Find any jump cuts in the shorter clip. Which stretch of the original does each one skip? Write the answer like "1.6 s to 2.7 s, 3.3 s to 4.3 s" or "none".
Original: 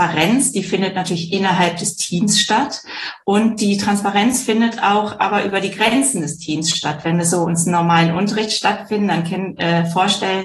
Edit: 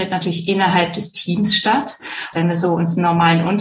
3.2 s to 7.0 s